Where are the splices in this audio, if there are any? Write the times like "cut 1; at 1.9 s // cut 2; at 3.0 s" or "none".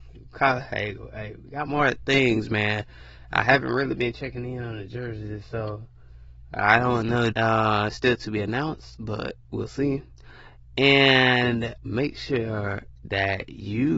cut 1; at 7.3 s // cut 2; at 11.8 s